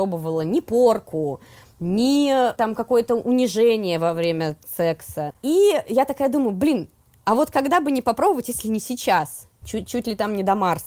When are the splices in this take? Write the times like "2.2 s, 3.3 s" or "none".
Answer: 5.3 s, 9.6 s